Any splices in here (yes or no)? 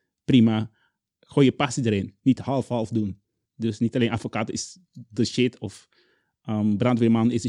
no